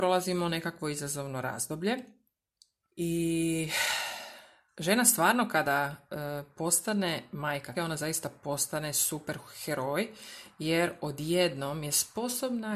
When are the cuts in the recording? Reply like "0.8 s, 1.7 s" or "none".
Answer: 2.8 s, 7.7 s